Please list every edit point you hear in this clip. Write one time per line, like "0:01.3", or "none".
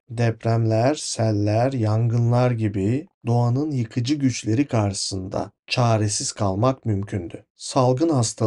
none